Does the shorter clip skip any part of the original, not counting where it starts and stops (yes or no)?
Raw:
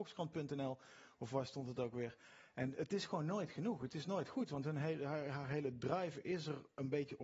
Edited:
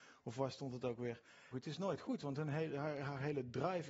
yes